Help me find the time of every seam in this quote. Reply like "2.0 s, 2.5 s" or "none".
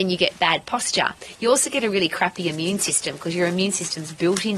none